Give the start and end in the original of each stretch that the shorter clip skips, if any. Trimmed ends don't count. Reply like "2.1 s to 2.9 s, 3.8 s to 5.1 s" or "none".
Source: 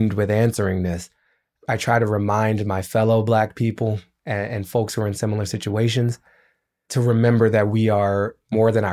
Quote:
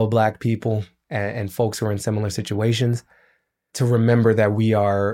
none